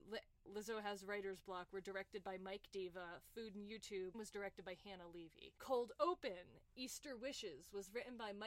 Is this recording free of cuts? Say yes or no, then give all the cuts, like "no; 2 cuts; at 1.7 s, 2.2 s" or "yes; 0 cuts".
no; 2 cuts; at 4.1 s, 5.6 s